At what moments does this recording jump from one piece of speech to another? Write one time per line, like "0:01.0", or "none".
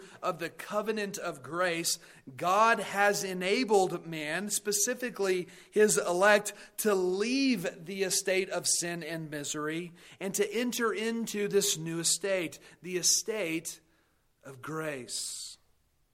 none